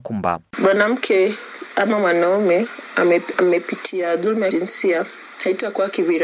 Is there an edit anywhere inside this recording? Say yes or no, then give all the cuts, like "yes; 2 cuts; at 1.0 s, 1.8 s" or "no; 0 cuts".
yes; 1 cut; at 3.3 s